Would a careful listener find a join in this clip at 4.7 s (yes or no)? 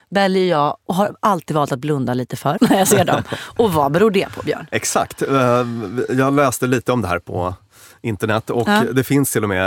no